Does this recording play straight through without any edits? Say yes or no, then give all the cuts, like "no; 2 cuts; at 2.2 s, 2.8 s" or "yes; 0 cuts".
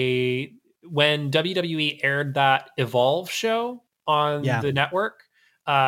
yes; 0 cuts